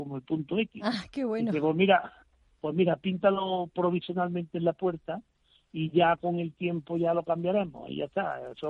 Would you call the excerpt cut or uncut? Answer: uncut